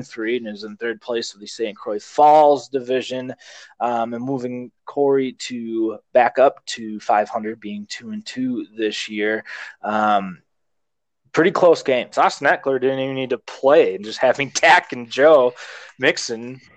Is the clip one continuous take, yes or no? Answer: no